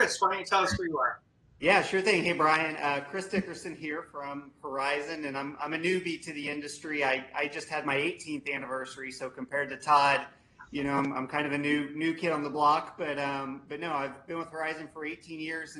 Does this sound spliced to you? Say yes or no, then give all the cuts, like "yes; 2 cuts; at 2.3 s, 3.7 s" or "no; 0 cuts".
no; 0 cuts